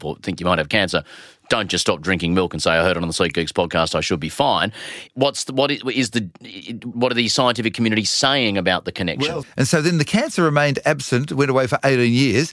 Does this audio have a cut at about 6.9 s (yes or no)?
yes